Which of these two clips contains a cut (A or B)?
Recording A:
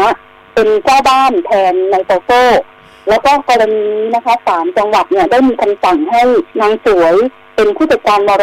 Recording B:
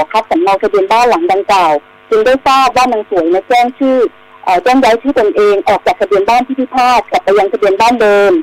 A